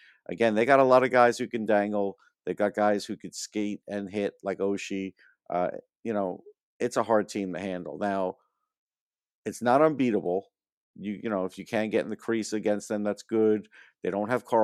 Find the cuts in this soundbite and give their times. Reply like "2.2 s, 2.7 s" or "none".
none

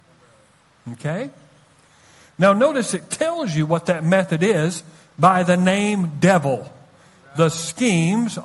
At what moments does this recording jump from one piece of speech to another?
none

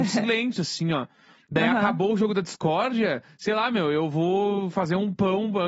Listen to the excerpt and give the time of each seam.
none

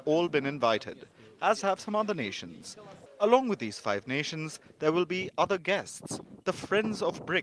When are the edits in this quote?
3.1 s

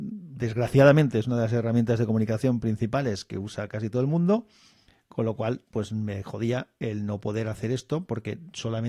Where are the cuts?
none

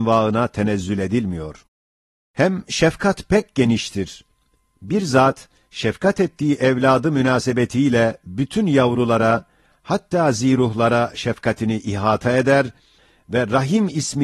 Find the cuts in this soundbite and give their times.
none

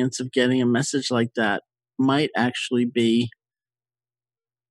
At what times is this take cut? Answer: none

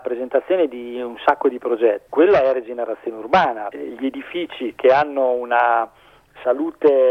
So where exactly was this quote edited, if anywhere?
2.1 s, 3.7 s

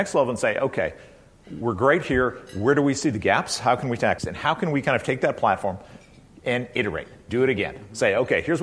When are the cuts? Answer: 4.2 s

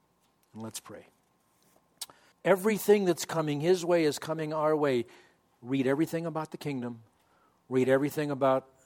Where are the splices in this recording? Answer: 2.3 s

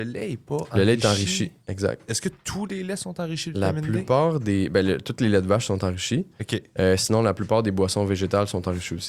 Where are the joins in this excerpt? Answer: none

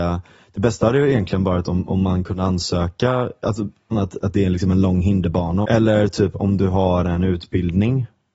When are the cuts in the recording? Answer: 3.9 s, 5.6 s

